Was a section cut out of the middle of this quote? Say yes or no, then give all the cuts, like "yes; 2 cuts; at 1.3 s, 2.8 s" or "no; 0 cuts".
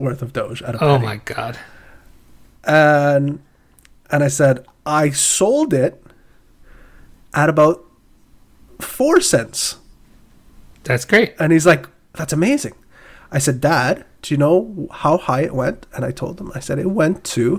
no; 0 cuts